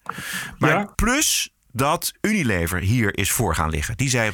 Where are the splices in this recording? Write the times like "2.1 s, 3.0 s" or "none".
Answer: 0.9 s